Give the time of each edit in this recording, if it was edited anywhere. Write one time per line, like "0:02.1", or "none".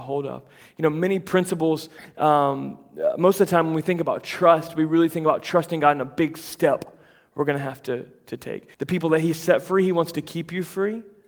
0:08.7